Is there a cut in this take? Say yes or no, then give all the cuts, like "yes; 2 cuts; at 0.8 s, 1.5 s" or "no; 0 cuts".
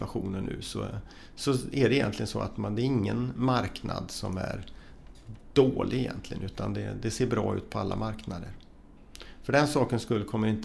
no; 0 cuts